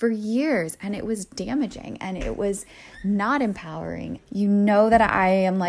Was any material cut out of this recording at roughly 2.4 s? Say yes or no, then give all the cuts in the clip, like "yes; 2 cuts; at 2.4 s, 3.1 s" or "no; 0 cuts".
no; 1 cut; at 4.2 s